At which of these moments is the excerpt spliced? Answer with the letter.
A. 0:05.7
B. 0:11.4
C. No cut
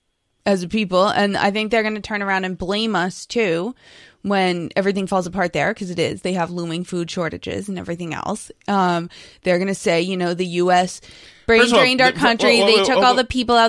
C